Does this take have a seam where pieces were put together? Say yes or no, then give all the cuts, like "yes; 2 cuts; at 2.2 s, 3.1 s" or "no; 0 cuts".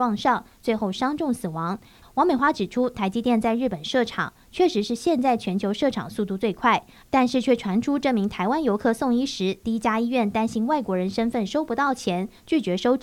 yes; 2 cuts; at 2.0 s, 7.0 s